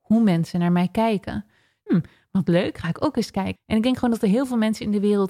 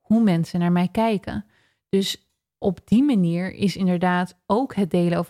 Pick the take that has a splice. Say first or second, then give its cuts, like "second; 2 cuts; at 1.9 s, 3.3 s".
first; 2 cuts; at 1.9 s, 3.6 s